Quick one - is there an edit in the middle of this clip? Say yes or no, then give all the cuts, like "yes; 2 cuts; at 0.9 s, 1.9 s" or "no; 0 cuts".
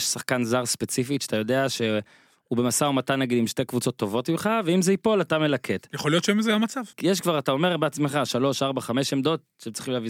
yes; 1 cut; at 6.9 s